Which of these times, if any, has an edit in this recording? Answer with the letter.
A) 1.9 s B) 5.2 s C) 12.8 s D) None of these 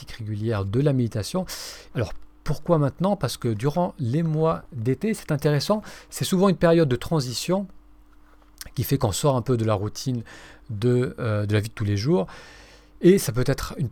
A